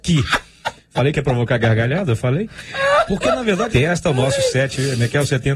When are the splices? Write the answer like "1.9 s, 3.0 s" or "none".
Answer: 3.7 s